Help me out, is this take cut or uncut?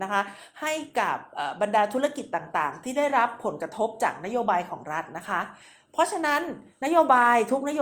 uncut